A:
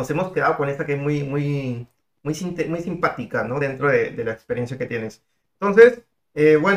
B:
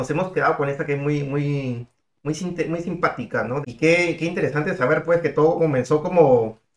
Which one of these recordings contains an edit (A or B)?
B